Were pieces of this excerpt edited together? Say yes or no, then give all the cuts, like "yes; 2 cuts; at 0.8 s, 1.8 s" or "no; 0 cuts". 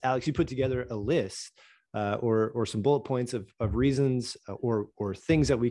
no; 0 cuts